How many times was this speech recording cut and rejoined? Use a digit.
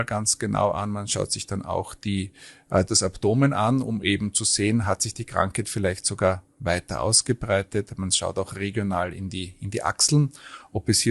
1